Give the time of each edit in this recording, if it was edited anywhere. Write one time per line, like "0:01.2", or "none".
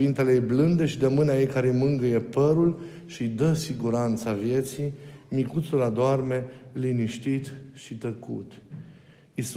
none